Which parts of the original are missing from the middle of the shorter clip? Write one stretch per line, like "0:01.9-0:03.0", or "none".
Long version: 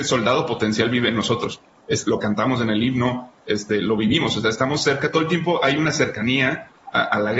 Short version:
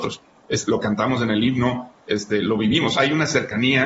0:04.4-0:05.6